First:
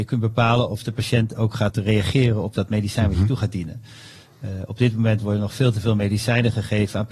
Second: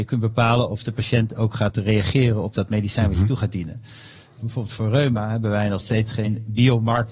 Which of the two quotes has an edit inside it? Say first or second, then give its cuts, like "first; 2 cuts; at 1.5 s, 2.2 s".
second; 1 cut; at 4.4 s